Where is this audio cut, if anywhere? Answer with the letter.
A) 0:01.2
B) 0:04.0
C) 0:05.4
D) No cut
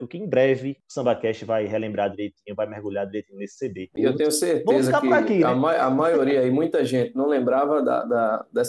B